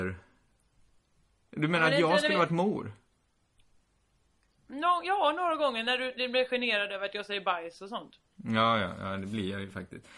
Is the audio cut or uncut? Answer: uncut